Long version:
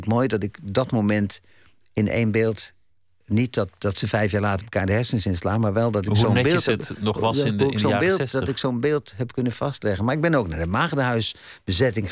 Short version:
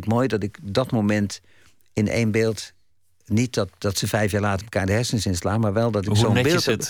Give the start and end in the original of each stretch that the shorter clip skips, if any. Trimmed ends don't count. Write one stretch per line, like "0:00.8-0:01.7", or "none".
none